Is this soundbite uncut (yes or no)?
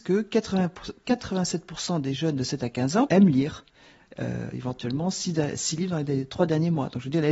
no